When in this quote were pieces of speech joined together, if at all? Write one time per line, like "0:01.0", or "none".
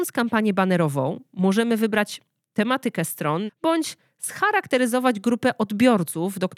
0:03.5